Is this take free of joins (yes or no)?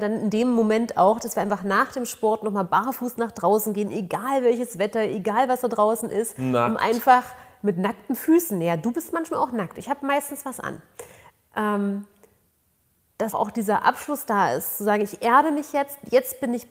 no